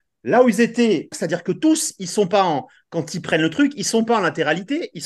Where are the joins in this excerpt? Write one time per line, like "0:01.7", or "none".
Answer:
0:01.1